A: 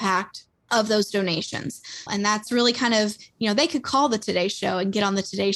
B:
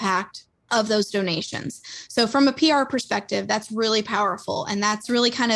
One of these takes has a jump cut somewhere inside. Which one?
A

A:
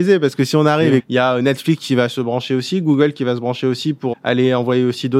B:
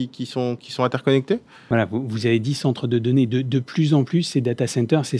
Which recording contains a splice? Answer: A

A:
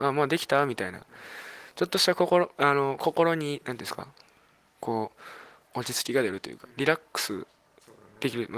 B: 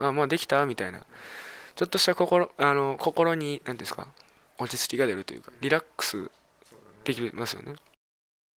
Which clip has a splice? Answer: B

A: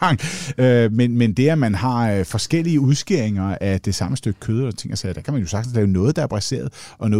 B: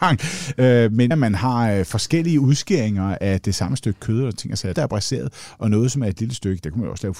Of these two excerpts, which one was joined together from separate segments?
B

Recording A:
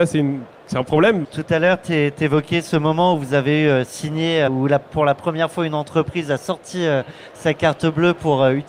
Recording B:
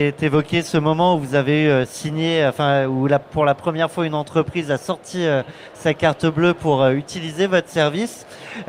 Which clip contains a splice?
A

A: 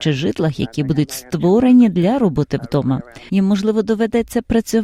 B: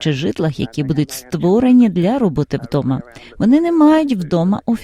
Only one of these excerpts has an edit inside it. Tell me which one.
A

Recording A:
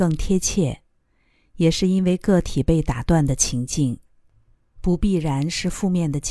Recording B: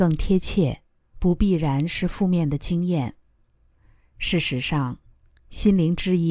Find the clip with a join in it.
B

